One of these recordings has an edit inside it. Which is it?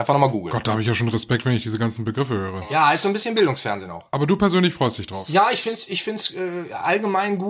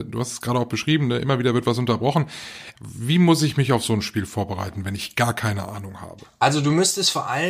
second; 1 cut; at 2.7 s

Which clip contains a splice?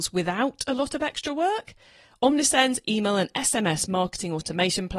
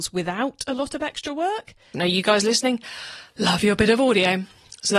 second; 1 cut; at 1.9 s

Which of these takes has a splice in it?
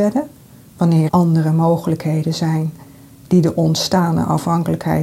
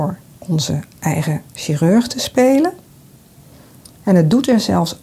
first; 1 cut; at 1.1 s

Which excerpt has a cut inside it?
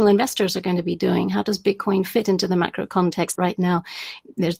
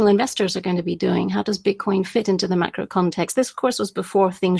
first; 1 cut; at 3.3 s

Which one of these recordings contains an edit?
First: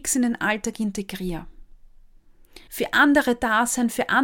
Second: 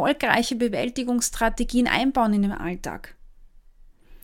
first; 1 cut; at 2.7 s

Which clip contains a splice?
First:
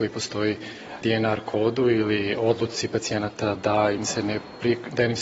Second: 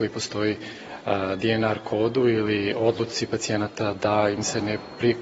first; 1 cut; at 1.0 s

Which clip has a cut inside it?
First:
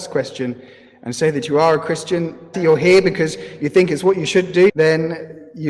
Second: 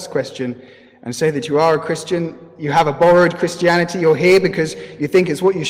first; 2 cuts; at 2.5 s, 4.7 s

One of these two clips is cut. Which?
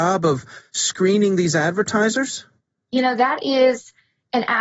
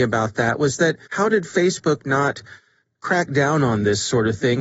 second; 1 cut; at 1.0 s

